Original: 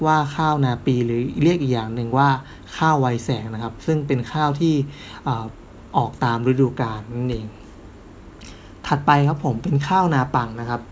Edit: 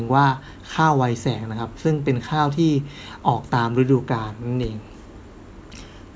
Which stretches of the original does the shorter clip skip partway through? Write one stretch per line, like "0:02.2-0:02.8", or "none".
0:05.2-0:05.9